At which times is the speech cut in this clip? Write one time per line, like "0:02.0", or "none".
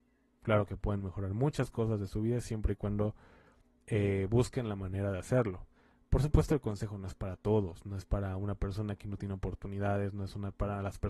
none